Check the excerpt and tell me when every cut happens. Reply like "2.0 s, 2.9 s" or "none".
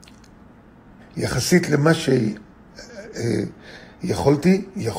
1.0 s